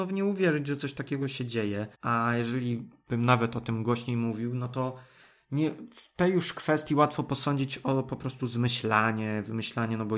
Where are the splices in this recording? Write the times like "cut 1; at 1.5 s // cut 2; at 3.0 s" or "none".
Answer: cut 1; at 1.9 s